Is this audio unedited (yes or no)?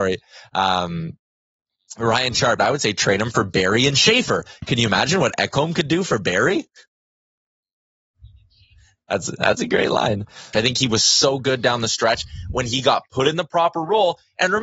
no